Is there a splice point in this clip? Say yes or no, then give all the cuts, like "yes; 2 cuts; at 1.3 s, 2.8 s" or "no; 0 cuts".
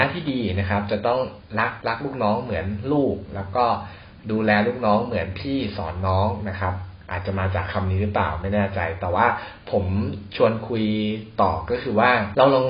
no; 0 cuts